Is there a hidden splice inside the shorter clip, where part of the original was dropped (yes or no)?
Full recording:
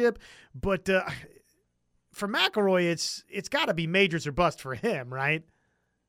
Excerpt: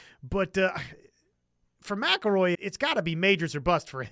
yes